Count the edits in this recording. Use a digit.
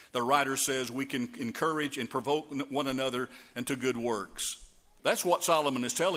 1